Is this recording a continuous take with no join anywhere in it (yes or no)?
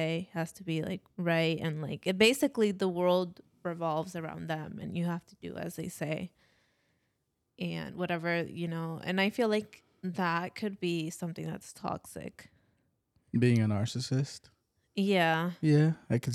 no